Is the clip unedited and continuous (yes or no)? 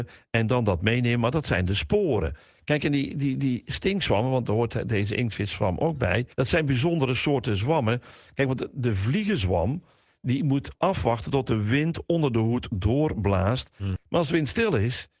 no